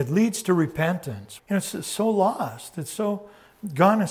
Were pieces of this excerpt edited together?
yes; 1 cut; at 1.4 s

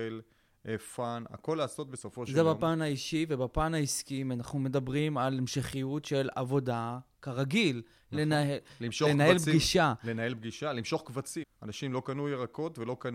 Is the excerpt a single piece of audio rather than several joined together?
no; 1 cut; at 11.4 s

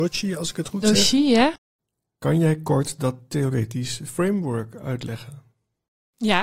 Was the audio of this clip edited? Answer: no; 0 cuts

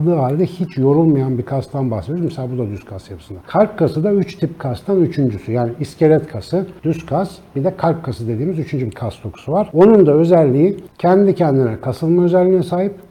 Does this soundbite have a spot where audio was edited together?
no; 0 cuts

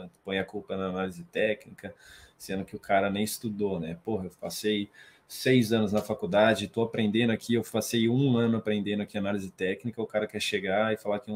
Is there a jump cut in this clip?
no; 0 cuts

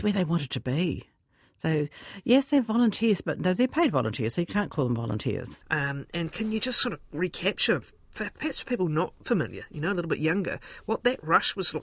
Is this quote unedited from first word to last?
no; 1 cut; at 5.6 s

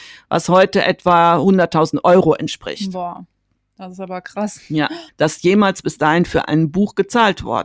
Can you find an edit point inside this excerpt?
yes; 1 cut; at 5.1 s

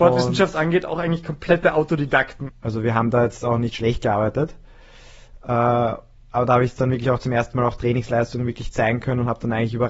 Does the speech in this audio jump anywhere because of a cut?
yes; 1 cut; at 2.5 s

